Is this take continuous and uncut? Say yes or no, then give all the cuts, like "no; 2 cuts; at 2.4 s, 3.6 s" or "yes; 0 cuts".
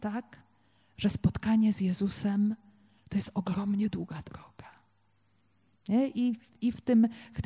yes; 0 cuts